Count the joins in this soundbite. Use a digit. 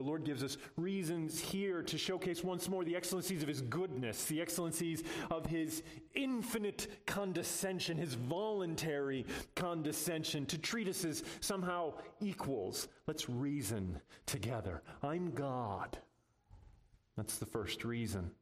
0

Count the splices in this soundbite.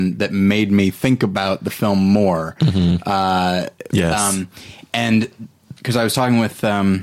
1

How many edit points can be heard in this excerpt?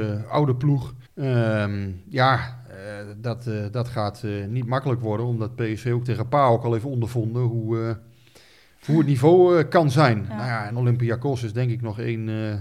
1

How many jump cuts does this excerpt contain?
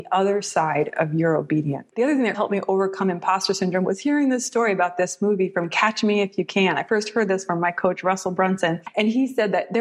1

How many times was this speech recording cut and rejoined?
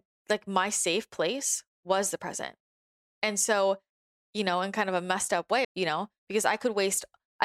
1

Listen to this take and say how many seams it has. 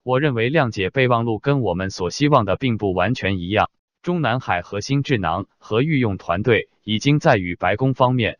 1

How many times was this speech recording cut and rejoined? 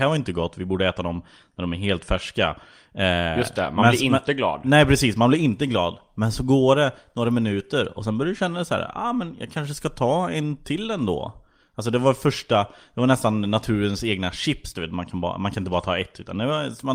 0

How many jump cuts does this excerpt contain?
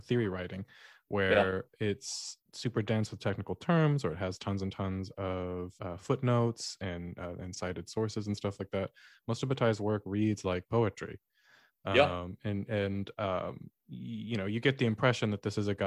1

